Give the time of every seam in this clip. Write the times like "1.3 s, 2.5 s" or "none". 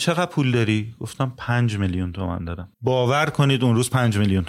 2.7 s